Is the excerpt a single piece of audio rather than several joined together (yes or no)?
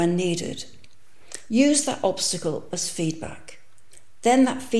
no